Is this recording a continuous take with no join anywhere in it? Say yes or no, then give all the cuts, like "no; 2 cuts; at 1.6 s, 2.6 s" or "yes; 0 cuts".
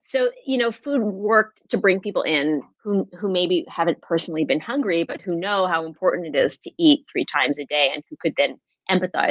no; 1 cut; at 2.7 s